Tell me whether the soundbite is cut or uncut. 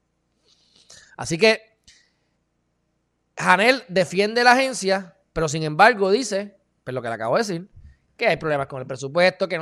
uncut